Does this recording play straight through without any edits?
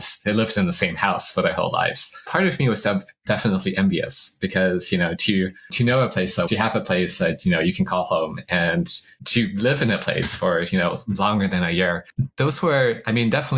no; 1 cut; at 6.5 s

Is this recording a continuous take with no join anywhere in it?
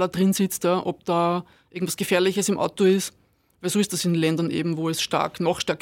yes; 0 cuts

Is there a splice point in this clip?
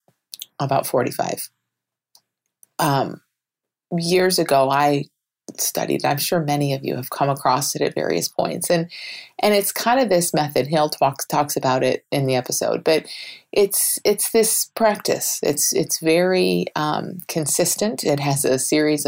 no; 0 cuts

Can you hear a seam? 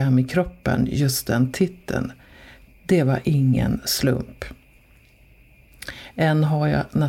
no; 0 cuts

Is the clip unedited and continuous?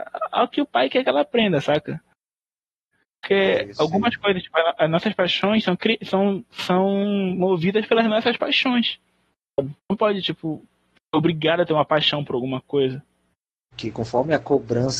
no; 2 cuts; at 9.8 s, 13.7 s

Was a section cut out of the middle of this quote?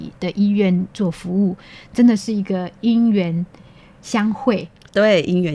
no; 0 cuts

